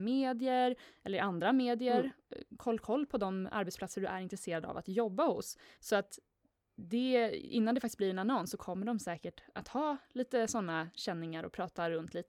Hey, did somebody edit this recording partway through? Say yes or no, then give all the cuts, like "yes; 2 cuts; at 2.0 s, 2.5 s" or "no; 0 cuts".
yes; 1 cut; at 5.8 s